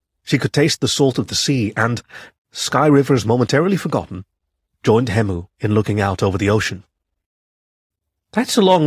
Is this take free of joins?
yes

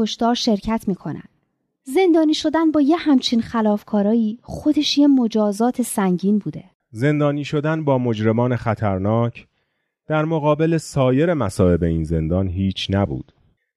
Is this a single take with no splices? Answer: no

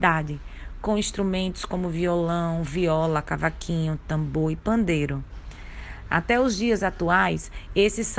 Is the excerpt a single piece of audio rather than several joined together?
yes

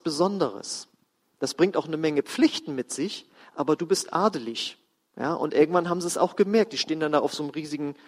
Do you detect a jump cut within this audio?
no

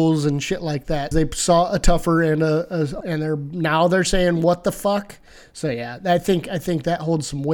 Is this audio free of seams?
no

